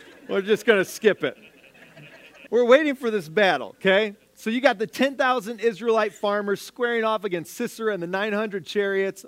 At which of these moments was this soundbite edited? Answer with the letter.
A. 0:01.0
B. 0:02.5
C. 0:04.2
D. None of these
B